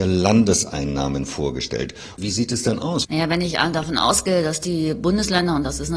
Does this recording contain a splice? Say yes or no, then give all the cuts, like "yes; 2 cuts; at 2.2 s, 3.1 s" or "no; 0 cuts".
yes; 1 cut; at 3.0 s